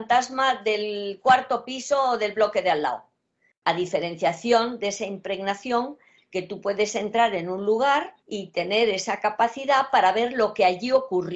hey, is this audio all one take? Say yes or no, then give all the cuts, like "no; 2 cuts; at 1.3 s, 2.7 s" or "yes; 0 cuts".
no; 2 cuts; at 3.6 s, 8.2 s